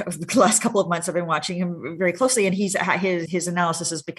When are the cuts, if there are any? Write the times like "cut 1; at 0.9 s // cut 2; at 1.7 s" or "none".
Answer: cut 1; at 3.3 s

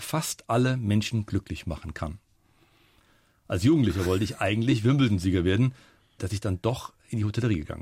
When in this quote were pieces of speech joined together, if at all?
cut 1; at 6.2 s

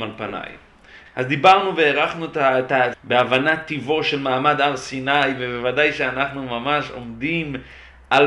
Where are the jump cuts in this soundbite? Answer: cut 1; at 1.1 s // cut 2; at 2.9 s

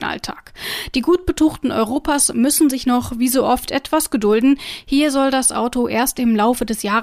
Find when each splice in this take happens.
none

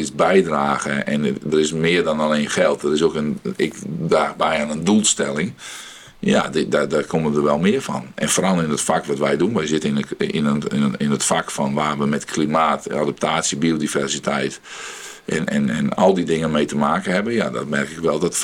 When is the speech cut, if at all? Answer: none

